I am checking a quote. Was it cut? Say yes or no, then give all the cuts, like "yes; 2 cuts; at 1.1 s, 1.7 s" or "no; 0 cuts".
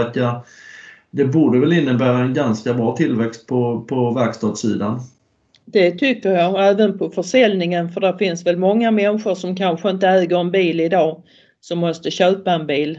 no; 0 cuts